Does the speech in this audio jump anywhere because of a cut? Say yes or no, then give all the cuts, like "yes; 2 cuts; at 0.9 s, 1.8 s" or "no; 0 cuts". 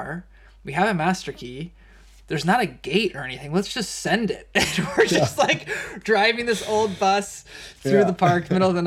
no; 0 cuts